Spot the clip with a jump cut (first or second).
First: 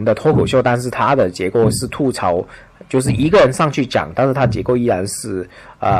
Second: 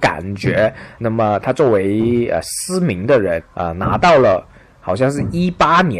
second